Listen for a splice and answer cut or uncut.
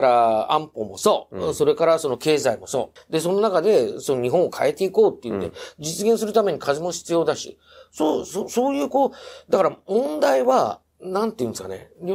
cut